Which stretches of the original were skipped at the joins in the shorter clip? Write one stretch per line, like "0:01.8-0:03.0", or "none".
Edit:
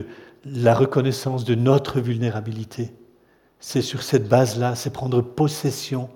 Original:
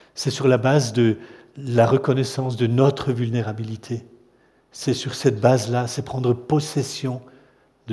none